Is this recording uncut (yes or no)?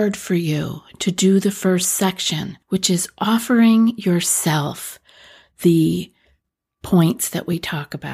no